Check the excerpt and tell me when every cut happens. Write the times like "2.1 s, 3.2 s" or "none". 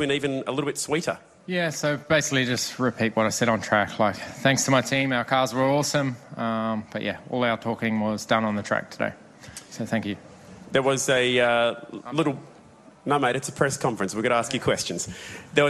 none